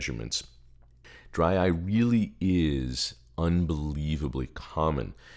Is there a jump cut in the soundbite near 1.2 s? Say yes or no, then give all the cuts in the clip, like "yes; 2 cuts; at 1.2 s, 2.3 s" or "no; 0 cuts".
no; 0 cuts